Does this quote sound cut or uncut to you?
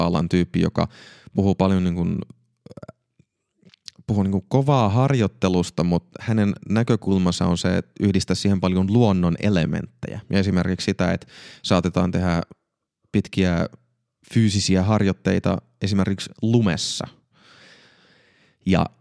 uncut